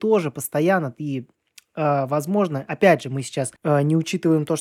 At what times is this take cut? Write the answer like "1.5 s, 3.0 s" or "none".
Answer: 3.6 s